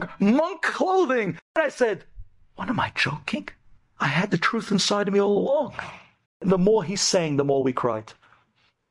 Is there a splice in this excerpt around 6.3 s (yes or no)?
yes